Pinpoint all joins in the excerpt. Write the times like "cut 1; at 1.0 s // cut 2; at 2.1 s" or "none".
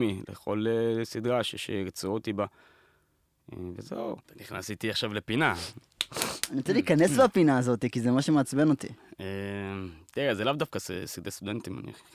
cut 1; at 4.2 s